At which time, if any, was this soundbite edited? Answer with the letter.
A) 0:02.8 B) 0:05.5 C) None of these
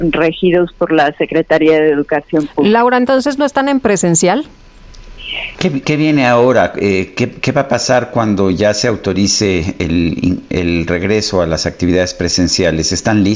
B